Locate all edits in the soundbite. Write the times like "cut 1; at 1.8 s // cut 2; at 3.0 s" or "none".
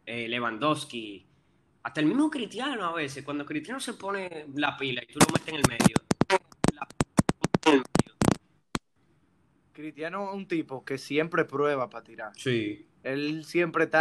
none